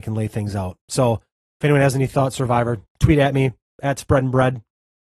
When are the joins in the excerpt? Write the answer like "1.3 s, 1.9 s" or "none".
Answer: 2.9 s

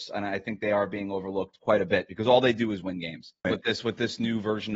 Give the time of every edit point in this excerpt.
3.4 s

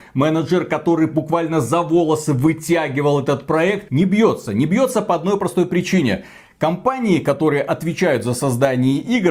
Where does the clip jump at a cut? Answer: 3.9 s

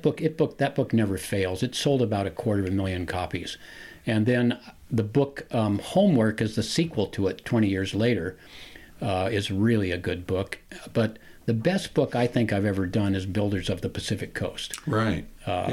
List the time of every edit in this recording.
none

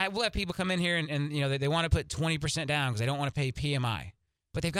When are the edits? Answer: none

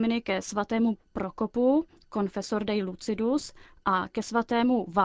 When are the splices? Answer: none

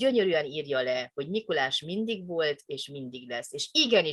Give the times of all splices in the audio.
none

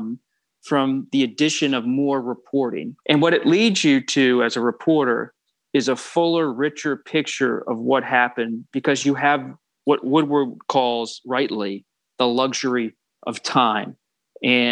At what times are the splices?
3.0 s

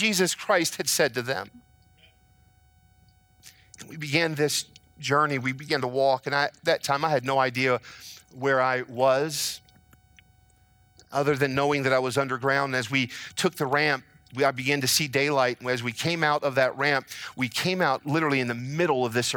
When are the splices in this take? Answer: none

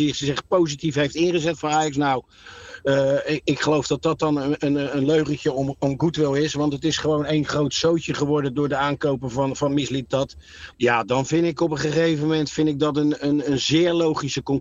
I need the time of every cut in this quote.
10.7 s

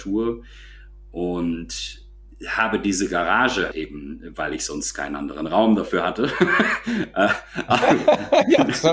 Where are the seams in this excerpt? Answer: 3.7 s

